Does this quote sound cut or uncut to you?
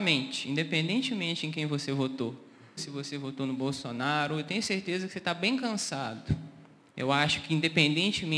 cut